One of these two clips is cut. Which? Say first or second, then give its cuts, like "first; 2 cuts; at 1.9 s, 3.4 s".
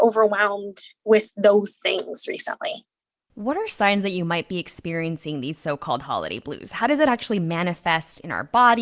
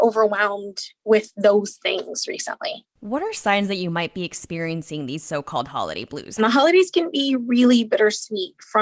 second; 2 cuts; at 2.9 s, 6.4 s